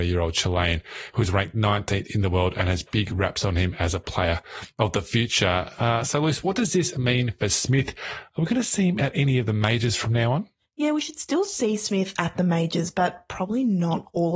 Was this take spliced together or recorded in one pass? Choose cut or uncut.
uncut